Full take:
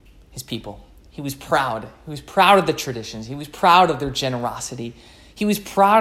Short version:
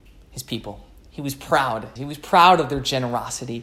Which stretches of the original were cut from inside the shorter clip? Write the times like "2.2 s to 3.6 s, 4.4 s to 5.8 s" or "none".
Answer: 2.0 s to 3.3 s